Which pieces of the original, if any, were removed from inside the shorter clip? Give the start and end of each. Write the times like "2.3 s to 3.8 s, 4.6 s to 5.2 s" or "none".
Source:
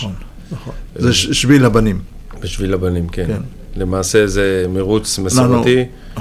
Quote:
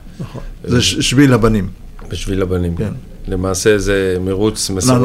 3.1 s to 3.3 s